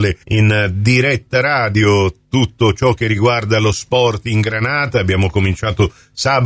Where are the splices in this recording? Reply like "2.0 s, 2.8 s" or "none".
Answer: none